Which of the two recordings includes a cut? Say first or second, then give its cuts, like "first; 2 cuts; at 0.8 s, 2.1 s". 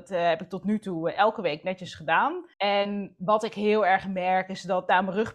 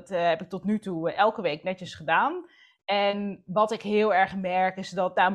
first; 1 cut; at 2.5 s